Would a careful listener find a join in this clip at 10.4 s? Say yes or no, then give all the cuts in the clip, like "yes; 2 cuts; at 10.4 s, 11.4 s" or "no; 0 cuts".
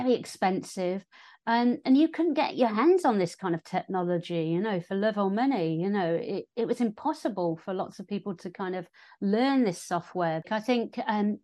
yes; 1 cut; at 10.4 s